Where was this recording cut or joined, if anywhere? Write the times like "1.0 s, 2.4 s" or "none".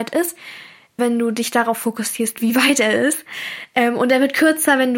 1.0 s